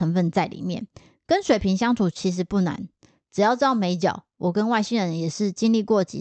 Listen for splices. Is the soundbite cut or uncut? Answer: uncut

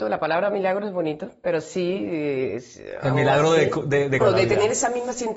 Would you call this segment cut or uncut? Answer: cut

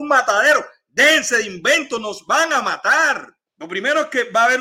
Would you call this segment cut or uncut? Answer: cut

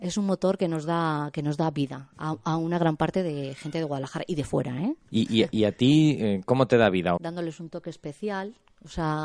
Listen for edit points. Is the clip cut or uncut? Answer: cut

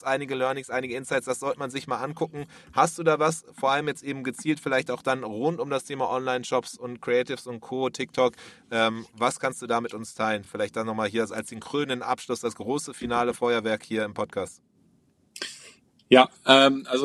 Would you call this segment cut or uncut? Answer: uncut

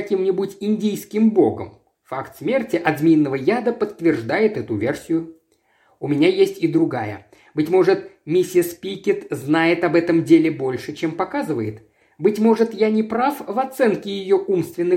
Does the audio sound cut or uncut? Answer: uncut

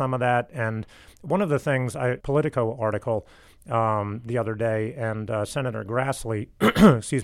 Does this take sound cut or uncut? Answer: cut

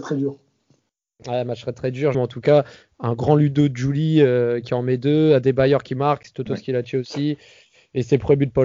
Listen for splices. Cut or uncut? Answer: cut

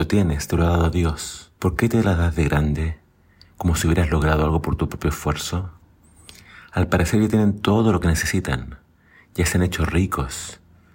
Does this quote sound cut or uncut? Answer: cut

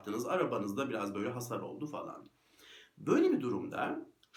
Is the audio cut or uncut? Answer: uncut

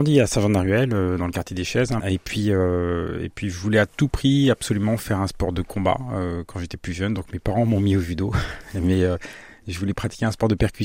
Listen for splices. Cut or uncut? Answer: cut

